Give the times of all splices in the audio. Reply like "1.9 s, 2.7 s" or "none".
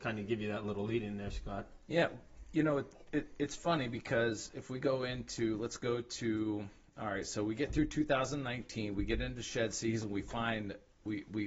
none